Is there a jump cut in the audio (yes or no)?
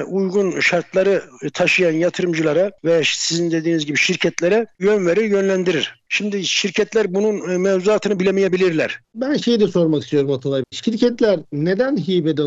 yes